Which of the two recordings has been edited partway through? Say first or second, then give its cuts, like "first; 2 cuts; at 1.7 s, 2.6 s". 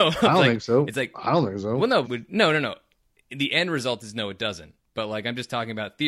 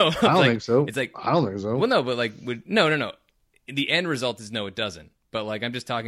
first; 1 cut; at 2.0 s